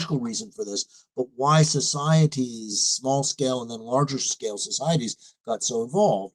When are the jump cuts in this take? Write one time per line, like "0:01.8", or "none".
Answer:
none